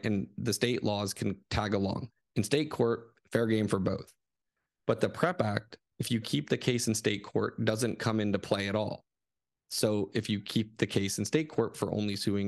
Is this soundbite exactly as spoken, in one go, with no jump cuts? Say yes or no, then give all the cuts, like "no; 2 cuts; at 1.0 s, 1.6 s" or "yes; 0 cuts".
yes; 0 cuts